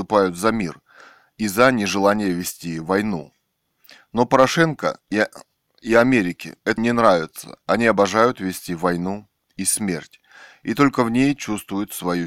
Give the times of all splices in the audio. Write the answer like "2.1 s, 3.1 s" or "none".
6.8 s